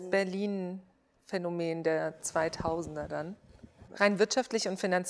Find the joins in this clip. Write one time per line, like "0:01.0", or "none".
0:03.9